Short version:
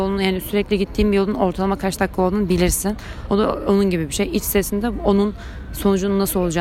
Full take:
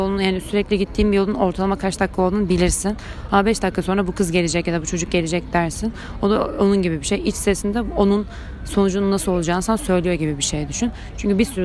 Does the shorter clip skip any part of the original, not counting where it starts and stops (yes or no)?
yes